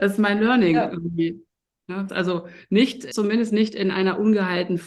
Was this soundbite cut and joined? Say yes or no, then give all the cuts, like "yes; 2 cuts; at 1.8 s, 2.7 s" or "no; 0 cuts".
yes; 2 cuts; at 2.1 s, 3.1 s